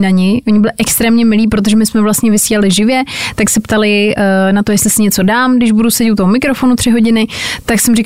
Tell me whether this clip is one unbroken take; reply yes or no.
yes